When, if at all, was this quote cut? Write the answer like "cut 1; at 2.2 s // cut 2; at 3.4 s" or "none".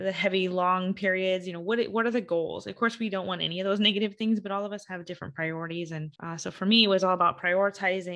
cut 1; at 6.1 s